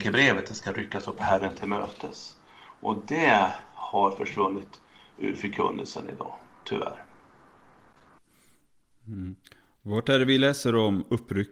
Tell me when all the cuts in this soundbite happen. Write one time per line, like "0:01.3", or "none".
none